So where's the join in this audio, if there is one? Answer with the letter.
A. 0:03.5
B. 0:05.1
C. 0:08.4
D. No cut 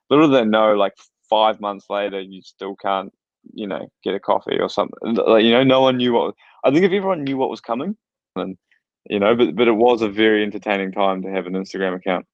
C